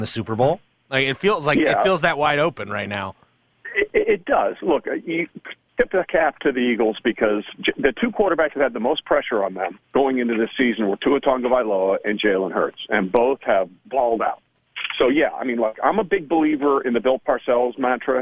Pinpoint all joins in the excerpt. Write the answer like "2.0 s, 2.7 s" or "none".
9.8 s